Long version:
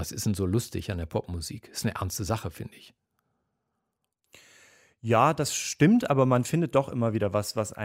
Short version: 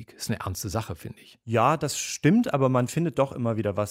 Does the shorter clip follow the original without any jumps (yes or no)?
no